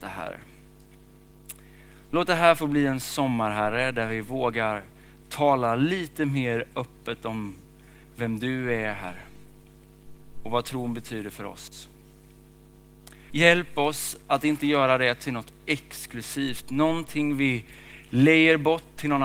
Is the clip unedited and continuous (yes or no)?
no